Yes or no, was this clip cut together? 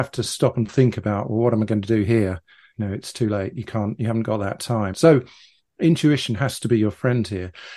yes